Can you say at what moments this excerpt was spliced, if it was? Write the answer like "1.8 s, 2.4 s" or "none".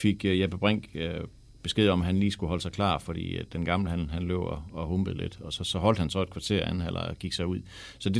none